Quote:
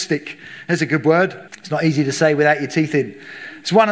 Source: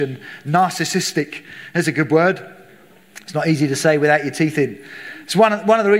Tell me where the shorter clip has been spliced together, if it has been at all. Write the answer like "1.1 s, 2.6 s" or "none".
1.5 s